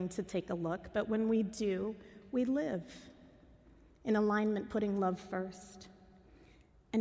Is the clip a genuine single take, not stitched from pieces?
yes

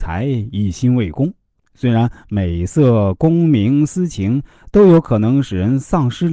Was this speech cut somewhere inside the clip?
yes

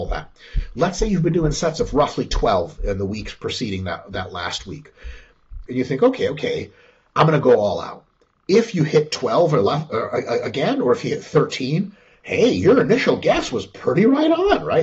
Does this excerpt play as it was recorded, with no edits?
no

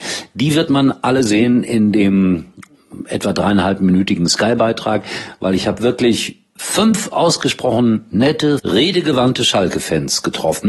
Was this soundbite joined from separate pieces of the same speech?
yes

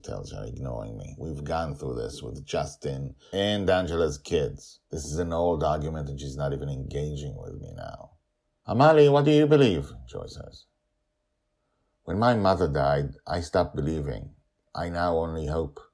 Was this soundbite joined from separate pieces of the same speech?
yes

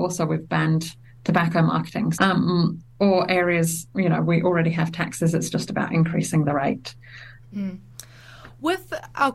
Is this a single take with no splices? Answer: no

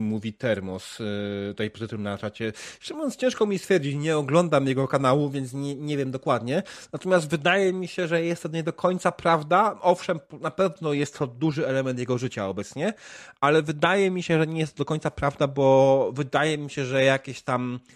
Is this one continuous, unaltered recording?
yes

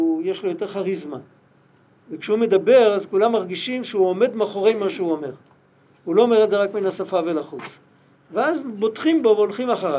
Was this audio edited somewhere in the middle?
no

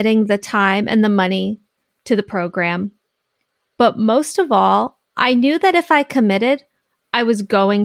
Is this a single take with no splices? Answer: yes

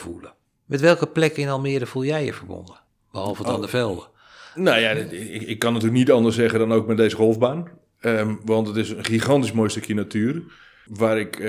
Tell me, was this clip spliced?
no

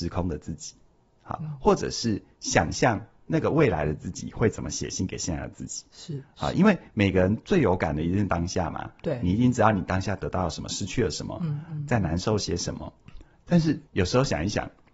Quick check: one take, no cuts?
no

